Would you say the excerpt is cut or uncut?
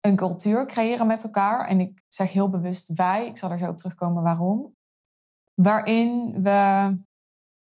uncut